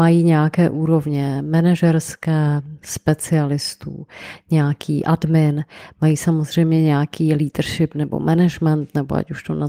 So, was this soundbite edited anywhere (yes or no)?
no